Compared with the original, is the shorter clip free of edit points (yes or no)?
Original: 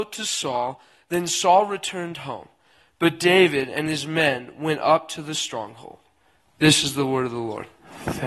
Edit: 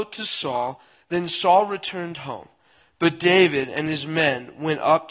yes